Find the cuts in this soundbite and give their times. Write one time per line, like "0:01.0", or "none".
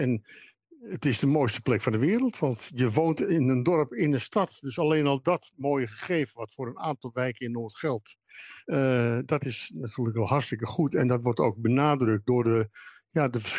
none